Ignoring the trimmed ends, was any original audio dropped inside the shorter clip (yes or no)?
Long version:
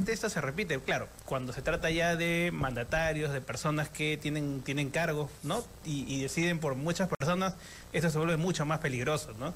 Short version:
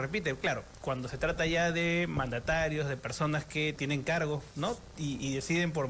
yes